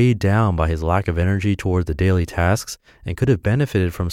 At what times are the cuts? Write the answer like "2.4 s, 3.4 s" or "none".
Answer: none